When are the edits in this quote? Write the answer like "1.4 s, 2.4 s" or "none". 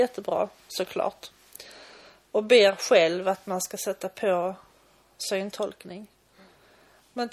none